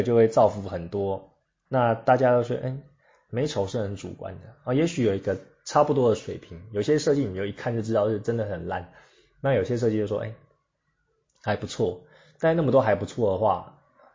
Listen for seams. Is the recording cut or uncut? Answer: cut